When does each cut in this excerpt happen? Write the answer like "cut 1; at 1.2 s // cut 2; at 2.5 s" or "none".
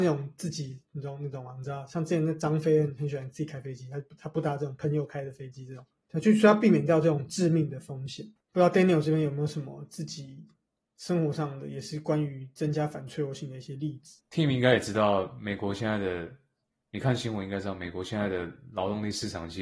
cut 1; at 8.4 s